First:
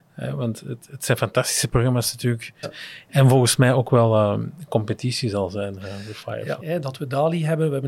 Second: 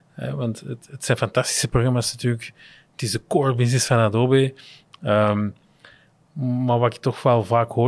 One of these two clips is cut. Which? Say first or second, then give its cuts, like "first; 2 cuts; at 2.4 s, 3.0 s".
first; 2 cuts; at 2.6 s, 6.6 s